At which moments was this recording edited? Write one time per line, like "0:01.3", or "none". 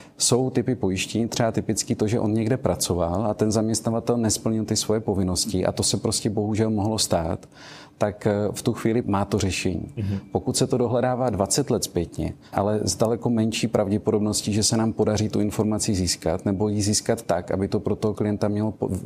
0:09.0
0:12.5